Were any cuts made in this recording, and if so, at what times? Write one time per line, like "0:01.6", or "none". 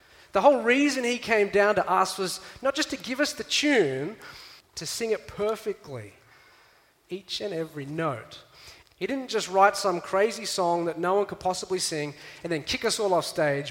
0:04.6
0:08.8